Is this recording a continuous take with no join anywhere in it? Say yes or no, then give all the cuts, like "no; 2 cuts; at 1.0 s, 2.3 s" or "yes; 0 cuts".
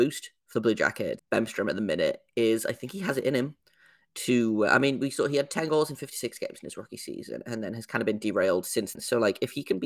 no; 2 cuts; at 1.2 s, 8.9 s